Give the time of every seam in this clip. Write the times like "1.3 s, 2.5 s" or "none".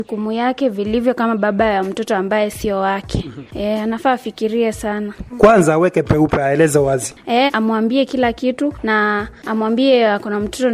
5.3 s, 7.5 s